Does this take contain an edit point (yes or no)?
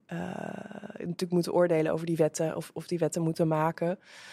no